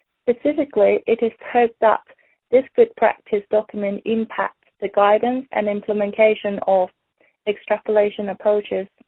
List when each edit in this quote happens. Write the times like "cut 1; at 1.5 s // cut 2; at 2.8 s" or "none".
cut 1; at 5.5 s